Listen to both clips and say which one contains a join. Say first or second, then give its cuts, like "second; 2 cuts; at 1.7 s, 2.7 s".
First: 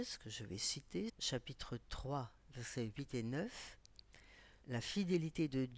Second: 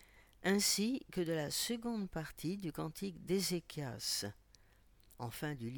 first; 2 cuts; at 1.1 s, 4.6 s